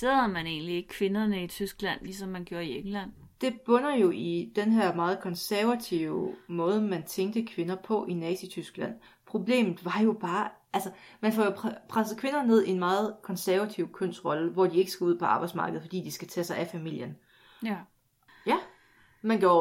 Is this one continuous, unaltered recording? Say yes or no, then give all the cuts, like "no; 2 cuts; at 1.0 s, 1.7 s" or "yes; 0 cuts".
no; 2 cuts; at 9.1 s, 18.3 s